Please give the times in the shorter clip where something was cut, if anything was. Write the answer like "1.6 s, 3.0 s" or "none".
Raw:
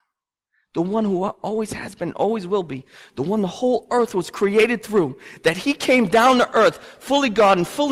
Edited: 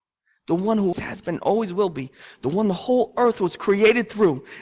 0.9 s